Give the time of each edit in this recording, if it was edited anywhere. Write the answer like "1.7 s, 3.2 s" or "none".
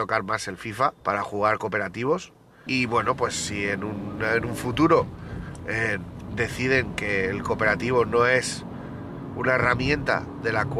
1.0 s, 2.7 s